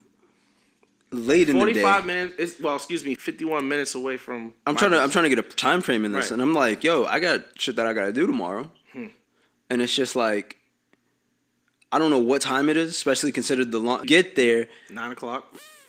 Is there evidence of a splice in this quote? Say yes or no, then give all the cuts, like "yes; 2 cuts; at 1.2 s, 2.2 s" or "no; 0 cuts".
yes; 2 cuts; at 3.2 s, 14.0 s